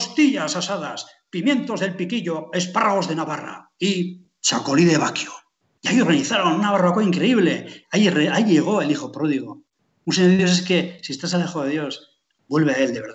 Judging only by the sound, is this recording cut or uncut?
uncut